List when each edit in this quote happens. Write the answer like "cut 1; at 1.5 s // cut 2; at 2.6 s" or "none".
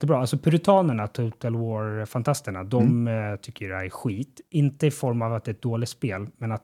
none